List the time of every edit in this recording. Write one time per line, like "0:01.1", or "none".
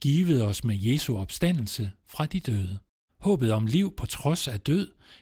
0:03.1